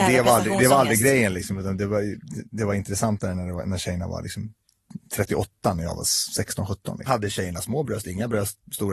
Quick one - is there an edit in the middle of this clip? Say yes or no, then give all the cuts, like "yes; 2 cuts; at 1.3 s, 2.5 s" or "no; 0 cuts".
yes; 1 cut; at 7.1 s